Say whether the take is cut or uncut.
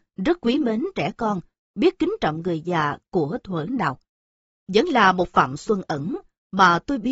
uncut